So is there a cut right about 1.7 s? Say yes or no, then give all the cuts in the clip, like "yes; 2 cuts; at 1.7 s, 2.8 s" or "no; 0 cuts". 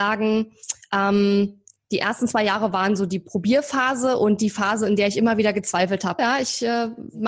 no; 1 cut; at 6.2 s